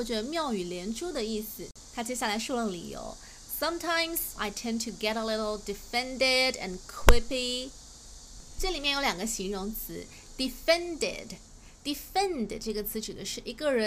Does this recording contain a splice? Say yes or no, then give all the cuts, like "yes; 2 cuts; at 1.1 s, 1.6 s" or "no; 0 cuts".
yes; 2 cuts; at 1.9 s, 4.4 s